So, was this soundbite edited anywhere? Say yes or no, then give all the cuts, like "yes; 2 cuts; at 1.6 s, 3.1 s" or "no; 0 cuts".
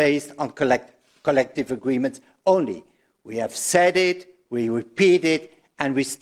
no; 0 cuts